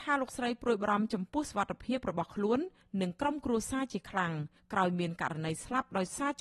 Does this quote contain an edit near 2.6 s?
no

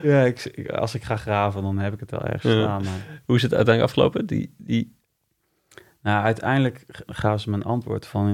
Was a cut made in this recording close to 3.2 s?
no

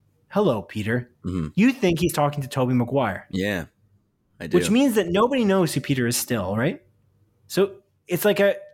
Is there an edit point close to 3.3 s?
no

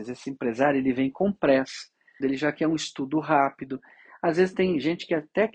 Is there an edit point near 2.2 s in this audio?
yes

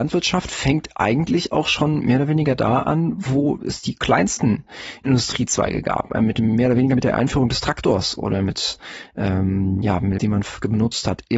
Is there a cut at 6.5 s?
no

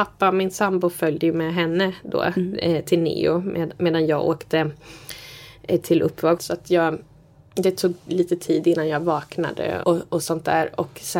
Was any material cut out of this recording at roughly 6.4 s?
yes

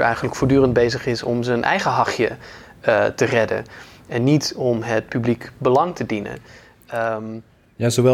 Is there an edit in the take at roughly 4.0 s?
no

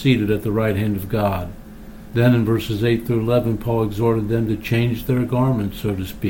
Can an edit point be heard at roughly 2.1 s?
yes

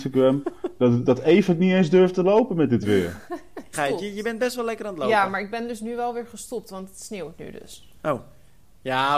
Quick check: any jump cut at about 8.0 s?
no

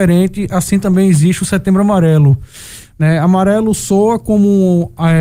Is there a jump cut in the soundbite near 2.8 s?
yes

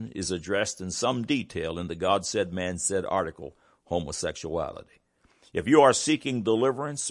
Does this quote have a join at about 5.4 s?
no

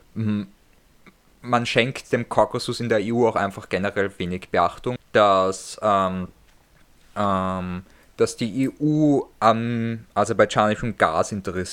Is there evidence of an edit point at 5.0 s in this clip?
yes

